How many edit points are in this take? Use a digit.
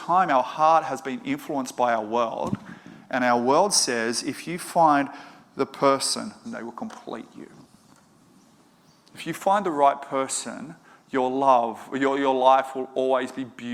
1